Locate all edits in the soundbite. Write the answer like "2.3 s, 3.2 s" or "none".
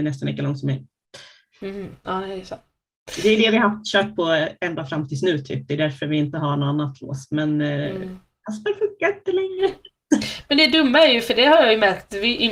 none